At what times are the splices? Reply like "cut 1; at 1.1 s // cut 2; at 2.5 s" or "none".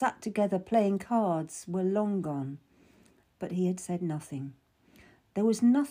cut 1; at 3.2 s